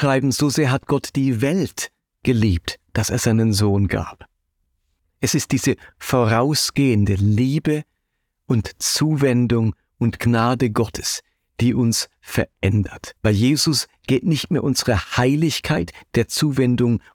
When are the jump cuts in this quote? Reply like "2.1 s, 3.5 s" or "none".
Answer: 5.0 s, 13.2 s